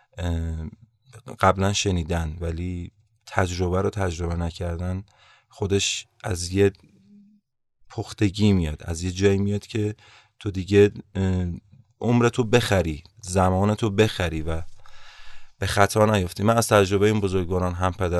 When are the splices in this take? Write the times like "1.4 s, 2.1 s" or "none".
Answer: none